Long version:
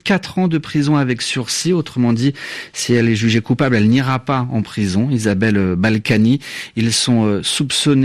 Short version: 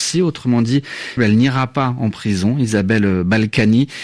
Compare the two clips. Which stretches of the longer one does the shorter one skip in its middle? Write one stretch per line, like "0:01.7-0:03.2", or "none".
0:02.7-0:03.7